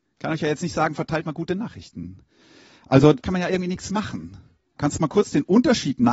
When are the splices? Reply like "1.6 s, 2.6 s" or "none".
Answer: 3.2 s, 4.8 s